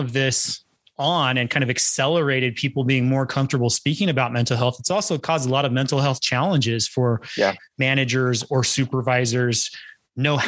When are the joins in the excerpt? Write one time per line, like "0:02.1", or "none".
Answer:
0:07.6